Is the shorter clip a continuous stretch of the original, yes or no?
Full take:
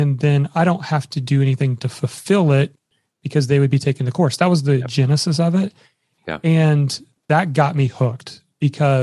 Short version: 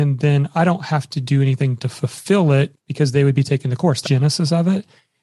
no